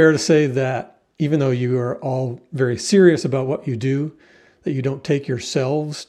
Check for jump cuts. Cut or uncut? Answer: uncut